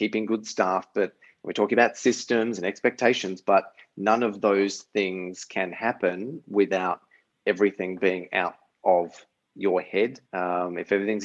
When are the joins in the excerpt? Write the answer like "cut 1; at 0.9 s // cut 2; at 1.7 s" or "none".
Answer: cut 1; at 10.2 s